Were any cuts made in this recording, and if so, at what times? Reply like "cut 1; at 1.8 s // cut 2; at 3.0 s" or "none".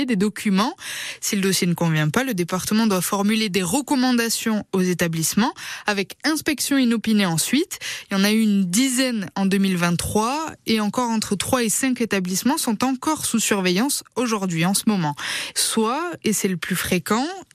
cut 1; at 1.2 s // cut 2; at 15.5 s